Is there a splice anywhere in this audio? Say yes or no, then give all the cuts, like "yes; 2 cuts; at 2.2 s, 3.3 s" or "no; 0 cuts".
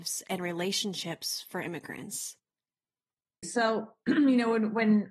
yes; 1 cut; at 3.4 s